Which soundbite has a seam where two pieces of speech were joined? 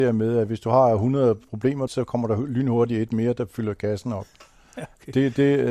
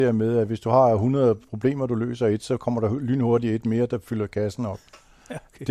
first; 1 cut; at 1.9 s

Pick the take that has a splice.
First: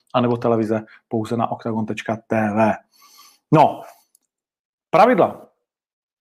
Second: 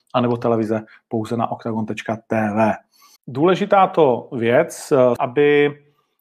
second; 2 cuts; at 3.2 s, 5.2 s

